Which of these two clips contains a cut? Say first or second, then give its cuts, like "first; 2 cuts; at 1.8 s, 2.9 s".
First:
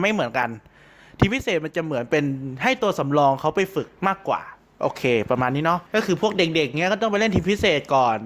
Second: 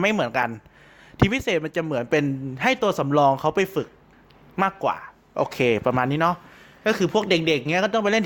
first; 2 cuts; at 4.0 s, 5.9 s